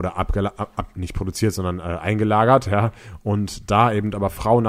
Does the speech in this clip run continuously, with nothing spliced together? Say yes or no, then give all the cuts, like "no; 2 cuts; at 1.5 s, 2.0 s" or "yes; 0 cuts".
yes; 0 cuts